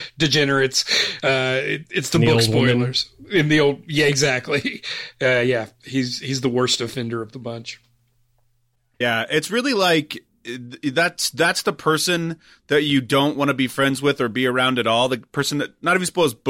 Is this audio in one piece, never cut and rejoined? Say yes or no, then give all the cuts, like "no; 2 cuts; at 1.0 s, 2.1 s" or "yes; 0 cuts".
yes; 0 cuts